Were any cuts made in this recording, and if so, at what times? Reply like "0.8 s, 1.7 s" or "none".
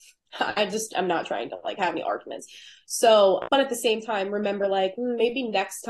3.5 s